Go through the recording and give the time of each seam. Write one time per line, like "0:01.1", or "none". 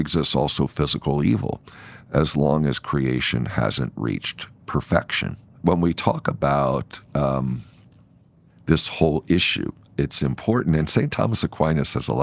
0:05.5
0:09.9